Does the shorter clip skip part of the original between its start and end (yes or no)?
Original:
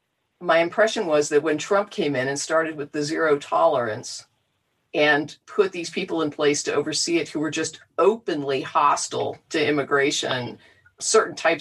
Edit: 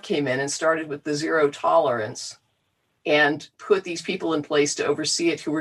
no